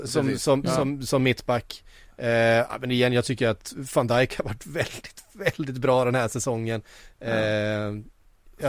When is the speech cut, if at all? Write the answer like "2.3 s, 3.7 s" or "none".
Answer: none